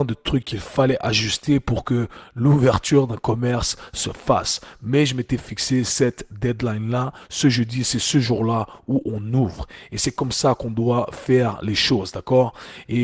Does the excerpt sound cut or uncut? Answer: uncut